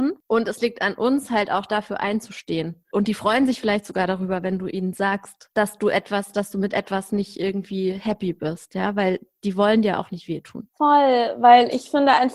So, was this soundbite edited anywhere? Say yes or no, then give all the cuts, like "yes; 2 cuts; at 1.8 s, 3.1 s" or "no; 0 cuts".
yes; 2 cuts; at 2.9 s, 10.7 s